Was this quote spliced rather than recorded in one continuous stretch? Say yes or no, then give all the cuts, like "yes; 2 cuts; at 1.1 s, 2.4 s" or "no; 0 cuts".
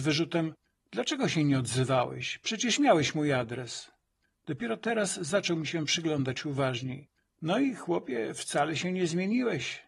no; 0 cuts